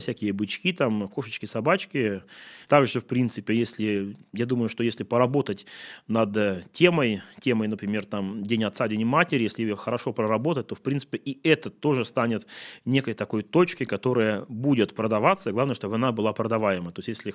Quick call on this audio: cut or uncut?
cut